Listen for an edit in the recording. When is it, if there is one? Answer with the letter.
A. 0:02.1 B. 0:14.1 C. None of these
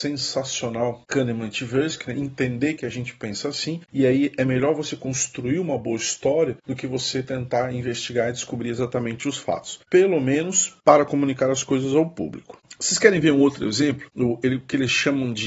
C